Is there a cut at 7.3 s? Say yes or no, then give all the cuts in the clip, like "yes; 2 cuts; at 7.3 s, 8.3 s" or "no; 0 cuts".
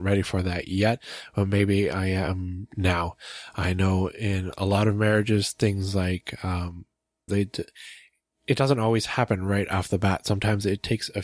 yes; 1 cut; at 7.3 s